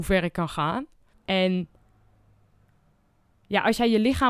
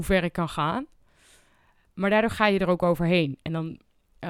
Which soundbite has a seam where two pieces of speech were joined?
first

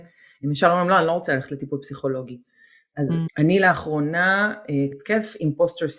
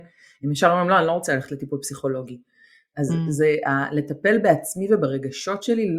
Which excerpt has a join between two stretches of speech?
first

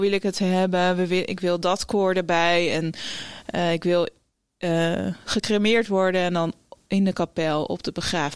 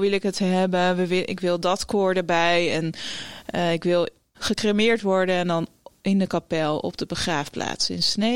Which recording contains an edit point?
second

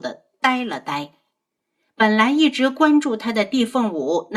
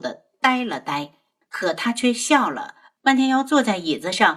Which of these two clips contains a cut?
second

